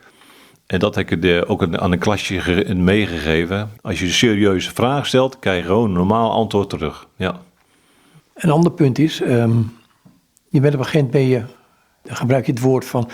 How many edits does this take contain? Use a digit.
1